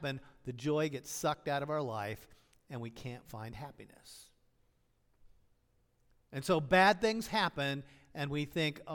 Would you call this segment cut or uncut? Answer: uncut